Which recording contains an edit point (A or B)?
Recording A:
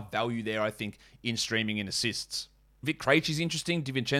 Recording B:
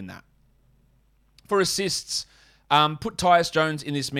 A